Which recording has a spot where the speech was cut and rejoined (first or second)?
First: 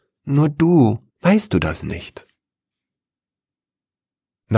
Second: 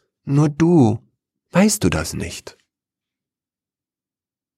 first